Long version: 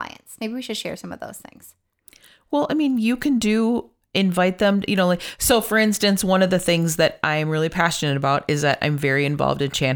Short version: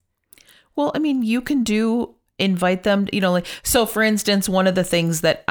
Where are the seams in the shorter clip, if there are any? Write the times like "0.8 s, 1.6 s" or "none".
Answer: none